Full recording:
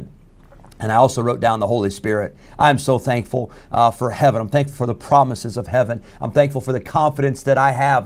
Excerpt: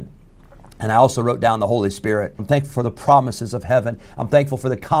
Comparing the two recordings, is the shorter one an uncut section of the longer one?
no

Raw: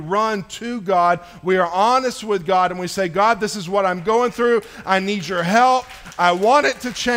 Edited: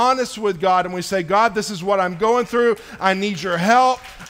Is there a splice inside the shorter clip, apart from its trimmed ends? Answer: no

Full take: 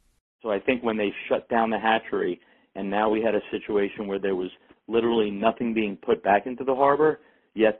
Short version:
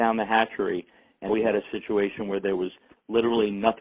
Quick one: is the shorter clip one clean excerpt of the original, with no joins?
no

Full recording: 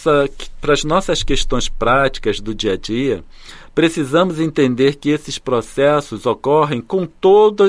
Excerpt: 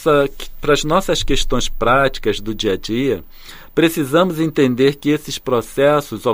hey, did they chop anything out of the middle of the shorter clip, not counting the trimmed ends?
no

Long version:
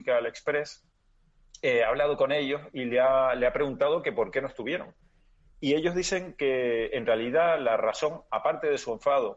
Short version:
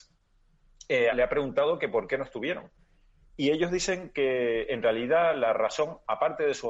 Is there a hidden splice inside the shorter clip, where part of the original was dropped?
yes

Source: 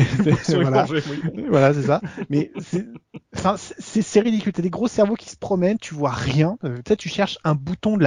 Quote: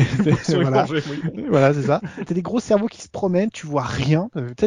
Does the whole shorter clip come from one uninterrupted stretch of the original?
no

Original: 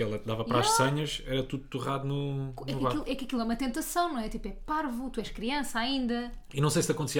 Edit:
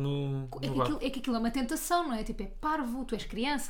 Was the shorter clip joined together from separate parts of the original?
no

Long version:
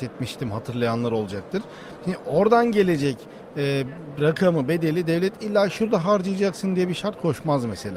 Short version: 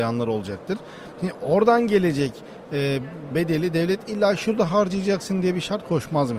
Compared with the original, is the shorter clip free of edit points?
no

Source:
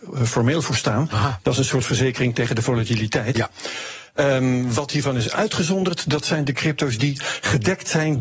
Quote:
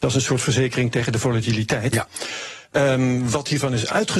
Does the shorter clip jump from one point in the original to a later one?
no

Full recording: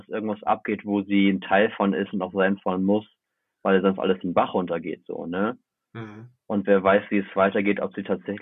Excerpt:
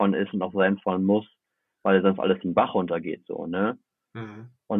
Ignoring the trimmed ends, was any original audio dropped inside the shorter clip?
no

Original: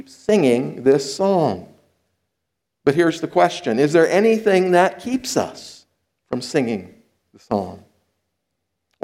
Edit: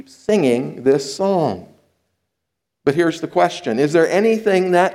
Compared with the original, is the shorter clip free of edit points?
yes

